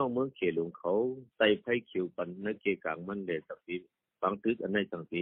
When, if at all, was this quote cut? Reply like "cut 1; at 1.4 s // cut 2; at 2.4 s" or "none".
none